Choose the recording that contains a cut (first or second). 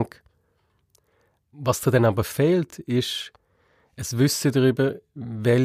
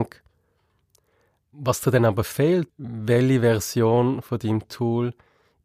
second